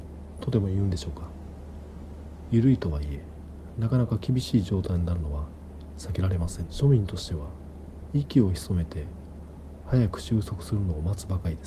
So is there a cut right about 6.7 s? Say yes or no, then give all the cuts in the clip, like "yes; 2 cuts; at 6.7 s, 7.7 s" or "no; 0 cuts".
yes; 1 cut; at 6.7 s